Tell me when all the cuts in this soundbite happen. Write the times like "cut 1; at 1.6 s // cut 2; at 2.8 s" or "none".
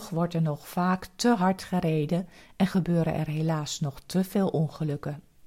none

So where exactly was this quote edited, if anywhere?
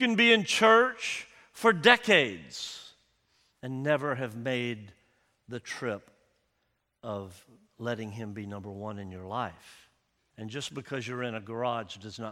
cut 1; at 10.3 s

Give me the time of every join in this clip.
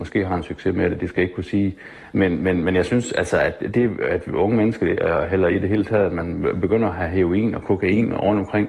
none

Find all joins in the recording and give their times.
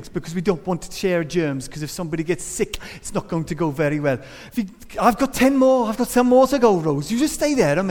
cut 1; at 4.5 s

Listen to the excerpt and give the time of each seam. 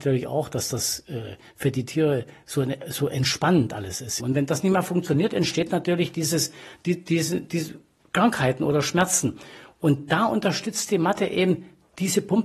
cut 1; at 4.2 s

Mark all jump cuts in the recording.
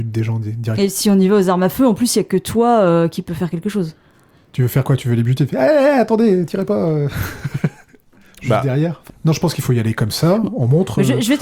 cut 1; at 9.1 s

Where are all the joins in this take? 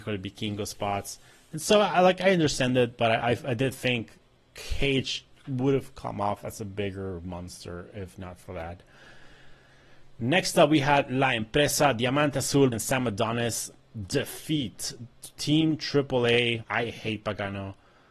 cut 1; at 12.7 s // cut 2; at 16.6 s

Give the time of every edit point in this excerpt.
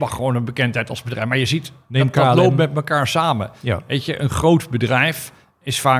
none

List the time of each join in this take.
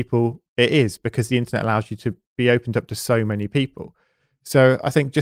none

